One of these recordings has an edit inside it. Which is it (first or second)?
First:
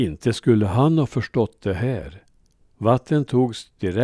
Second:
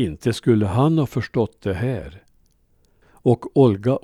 first